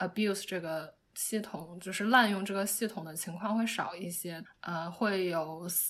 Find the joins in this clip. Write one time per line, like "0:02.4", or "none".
0:04.4